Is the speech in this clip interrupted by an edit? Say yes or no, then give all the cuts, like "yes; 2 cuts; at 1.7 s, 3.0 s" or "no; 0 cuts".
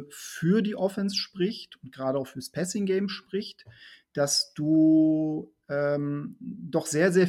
no; 0 cuts